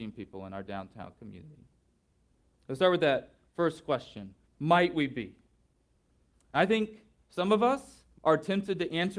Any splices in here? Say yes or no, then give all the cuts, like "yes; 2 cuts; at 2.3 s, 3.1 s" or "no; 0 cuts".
yes; 2 cuts; at 4.4 s, 8.1 s